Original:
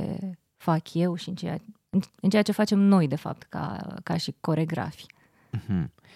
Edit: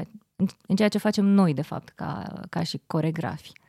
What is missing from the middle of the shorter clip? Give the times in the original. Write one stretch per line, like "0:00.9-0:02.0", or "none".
none

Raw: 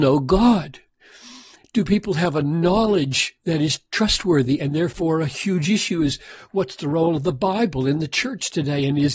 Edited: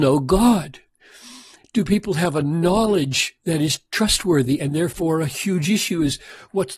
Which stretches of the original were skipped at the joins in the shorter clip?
none

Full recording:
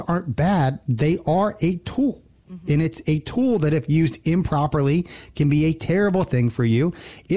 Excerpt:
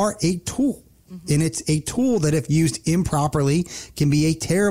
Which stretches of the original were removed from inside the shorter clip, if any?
none

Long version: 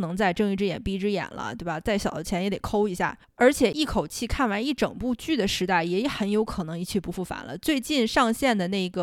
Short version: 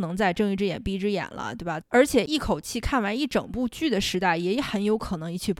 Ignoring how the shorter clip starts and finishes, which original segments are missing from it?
0:01.8-0:03.3

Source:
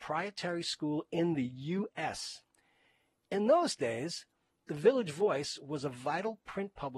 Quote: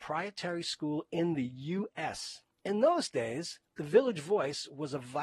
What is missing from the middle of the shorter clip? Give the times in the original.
0:02.5-0:03.2
0:04.3-0:04.6

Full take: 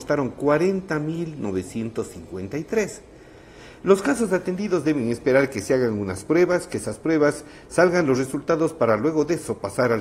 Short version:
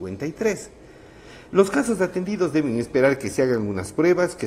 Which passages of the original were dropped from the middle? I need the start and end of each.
none

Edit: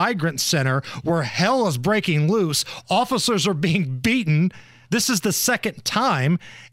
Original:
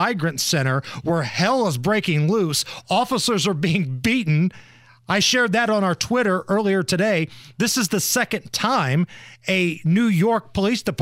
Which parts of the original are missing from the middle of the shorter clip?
0:04.8-0:07.5

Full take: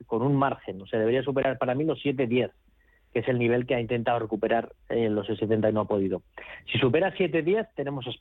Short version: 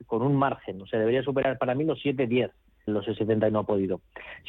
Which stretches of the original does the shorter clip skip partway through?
0:02.9-0:05.1

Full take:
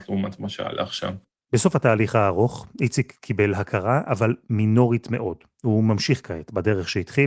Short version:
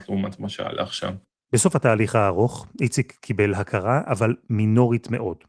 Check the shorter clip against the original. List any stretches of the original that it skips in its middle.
none

